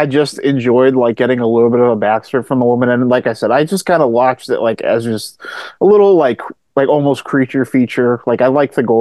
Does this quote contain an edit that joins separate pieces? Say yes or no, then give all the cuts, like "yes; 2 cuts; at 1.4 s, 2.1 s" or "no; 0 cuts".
no; 0 cuts